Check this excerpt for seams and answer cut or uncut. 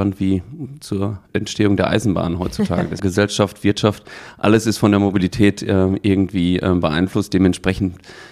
cut